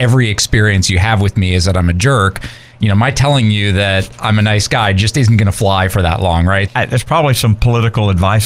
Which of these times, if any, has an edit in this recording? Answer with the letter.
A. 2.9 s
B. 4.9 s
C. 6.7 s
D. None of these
C